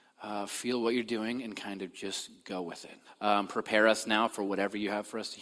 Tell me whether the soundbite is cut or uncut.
cut